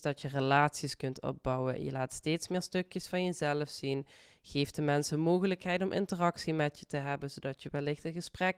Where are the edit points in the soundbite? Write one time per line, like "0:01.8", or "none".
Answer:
none